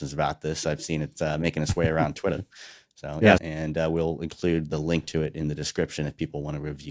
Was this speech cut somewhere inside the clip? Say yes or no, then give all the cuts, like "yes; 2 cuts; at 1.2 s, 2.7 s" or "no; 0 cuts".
yes; 1 cut; at 3.4 s